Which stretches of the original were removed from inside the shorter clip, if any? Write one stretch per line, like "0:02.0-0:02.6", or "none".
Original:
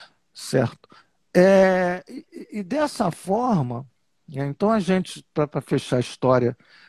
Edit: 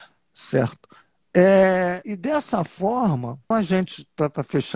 0:02.0-0:02.5
0:04.0-0:04.7